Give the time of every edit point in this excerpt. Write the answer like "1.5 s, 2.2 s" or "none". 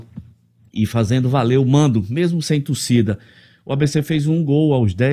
none